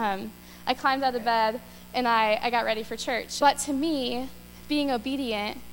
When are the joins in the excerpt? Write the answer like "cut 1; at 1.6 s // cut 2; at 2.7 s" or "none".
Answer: cut 1; at 3.4 s